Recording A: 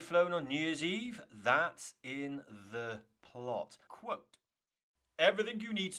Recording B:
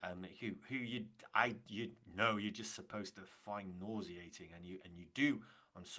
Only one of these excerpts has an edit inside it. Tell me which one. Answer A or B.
A